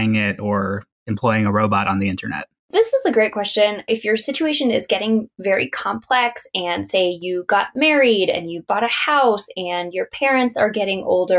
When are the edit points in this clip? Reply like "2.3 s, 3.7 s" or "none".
3.9 s